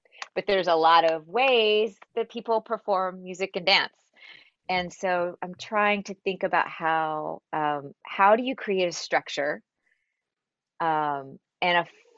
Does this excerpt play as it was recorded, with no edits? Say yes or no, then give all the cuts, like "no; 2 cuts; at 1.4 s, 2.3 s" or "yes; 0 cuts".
yes; 0 cuts